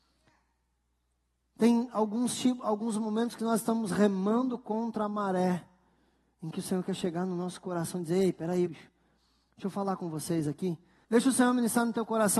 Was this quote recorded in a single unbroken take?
no; 2 cuts; at 8.7 s, 11.0 s

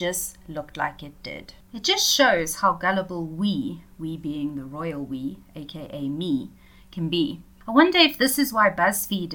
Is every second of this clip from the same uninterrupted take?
yes; 0 cuts

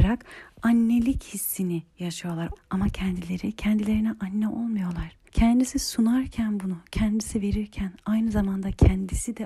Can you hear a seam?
yes; 2 cuts; at 2.6 s, 5.3 s

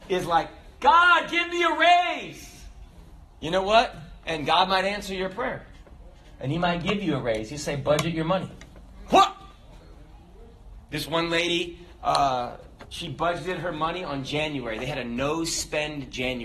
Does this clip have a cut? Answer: no; 0 cuts

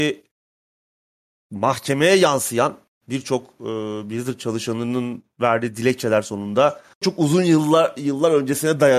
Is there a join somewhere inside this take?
yes; 1 cut; at 7.0 s

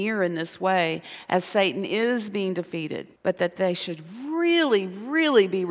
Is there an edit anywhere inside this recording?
yes; 1 cut; at 3.2 s

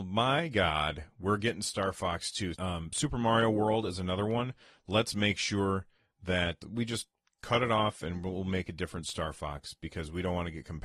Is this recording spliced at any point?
yes; 3 cuts; at 2.5 s, 4.8 s, 6.6 s

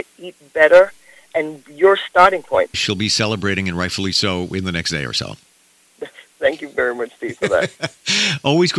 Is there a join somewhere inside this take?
yes; 1 cut; at 2.7 s

